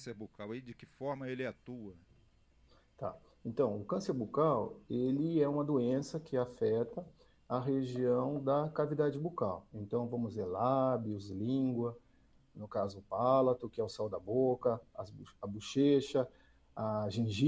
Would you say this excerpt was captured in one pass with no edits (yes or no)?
yes